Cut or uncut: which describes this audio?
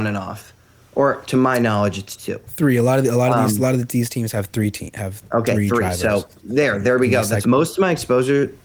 cut